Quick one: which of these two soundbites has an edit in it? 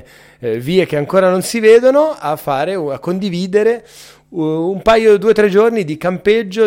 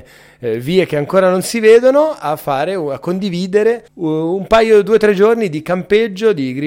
second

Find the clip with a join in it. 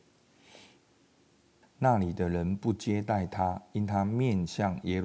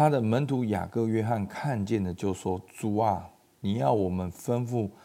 first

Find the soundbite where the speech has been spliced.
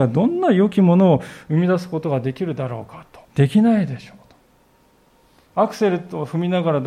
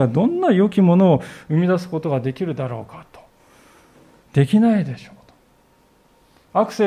first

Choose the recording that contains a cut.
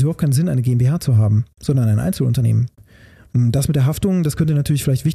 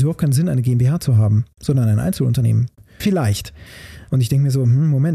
second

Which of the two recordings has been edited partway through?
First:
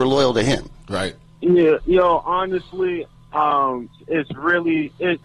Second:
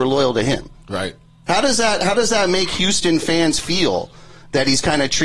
first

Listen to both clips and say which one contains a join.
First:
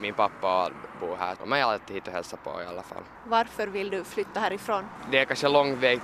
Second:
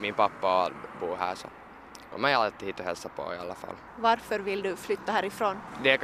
first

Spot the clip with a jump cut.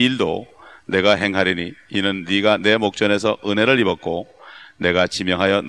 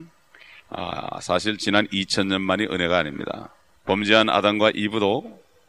second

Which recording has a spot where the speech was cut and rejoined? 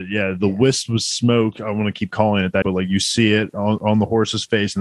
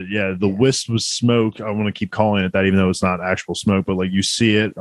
first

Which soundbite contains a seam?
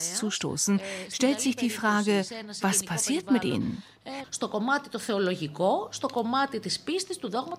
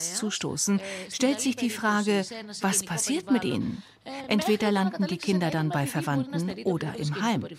first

